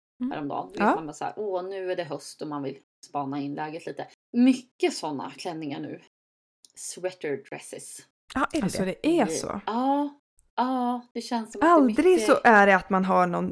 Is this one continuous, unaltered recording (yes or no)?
yes